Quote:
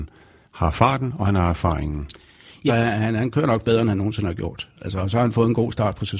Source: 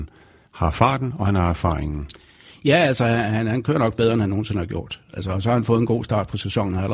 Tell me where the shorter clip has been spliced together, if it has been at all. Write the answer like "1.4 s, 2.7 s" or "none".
2.7 s